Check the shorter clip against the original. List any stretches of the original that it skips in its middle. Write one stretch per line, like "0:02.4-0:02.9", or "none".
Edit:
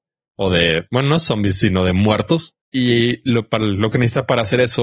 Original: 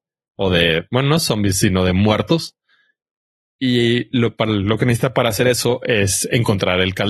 0:02.6-0:03.5